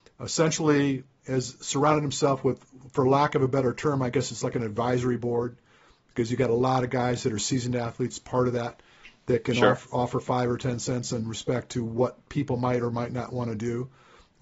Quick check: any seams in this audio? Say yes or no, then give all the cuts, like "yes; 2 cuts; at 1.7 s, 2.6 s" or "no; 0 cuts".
no; 0 cuts